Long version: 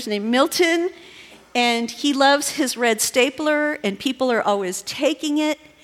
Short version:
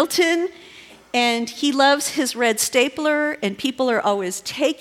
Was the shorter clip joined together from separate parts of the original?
no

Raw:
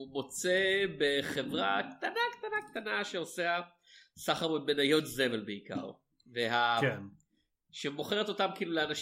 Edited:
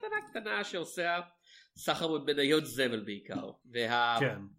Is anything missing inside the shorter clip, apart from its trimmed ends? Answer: yes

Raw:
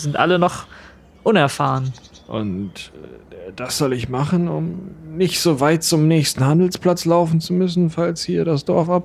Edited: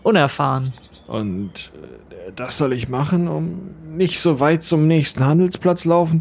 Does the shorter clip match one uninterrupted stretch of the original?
yes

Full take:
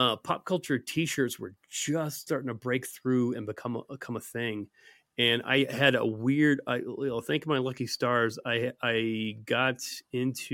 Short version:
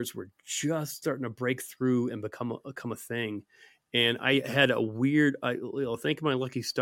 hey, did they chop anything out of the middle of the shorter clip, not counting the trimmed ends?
no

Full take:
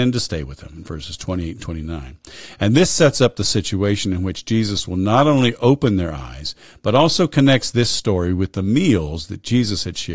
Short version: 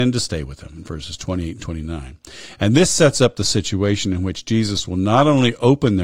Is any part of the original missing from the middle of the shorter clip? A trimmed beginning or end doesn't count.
no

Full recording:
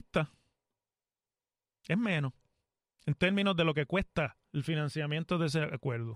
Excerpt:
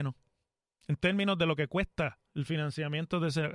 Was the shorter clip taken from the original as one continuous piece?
yes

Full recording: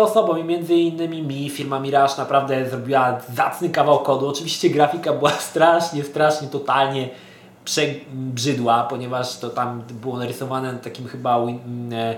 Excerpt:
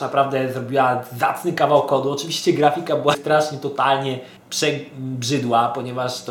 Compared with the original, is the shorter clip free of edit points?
no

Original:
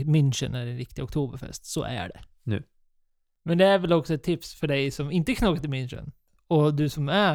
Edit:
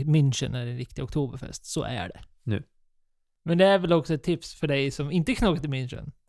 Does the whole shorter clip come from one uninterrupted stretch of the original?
yes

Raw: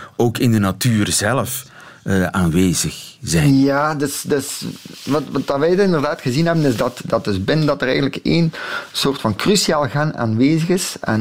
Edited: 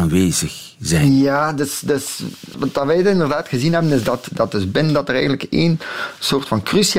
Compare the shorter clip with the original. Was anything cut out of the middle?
yes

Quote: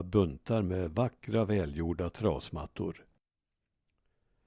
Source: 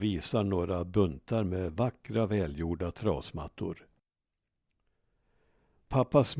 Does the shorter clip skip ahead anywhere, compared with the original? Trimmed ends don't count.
no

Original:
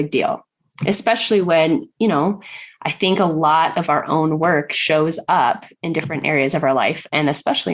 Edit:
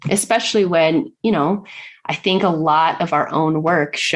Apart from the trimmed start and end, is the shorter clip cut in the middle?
no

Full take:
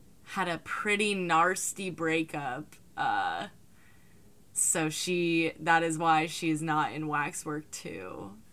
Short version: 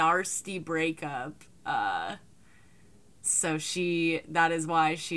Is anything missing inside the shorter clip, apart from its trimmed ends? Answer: no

